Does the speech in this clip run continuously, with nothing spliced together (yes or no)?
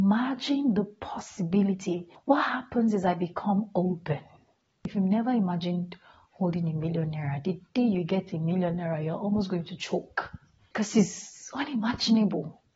yes